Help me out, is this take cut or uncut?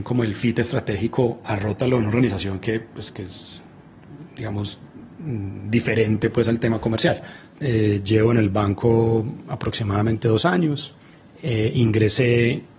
uncut